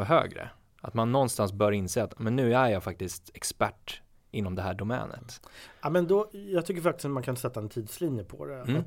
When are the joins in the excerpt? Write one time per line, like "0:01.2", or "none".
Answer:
0:06.3